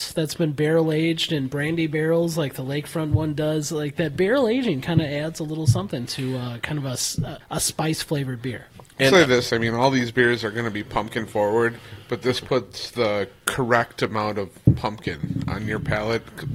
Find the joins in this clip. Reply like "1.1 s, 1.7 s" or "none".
none